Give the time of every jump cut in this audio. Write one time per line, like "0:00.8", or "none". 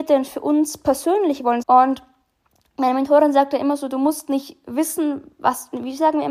0:01.6